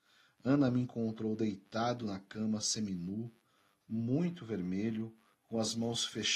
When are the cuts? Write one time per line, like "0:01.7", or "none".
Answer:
none